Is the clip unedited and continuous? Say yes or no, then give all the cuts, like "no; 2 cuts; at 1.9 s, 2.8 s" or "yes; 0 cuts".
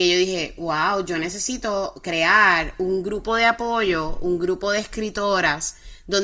yes; 0 cuts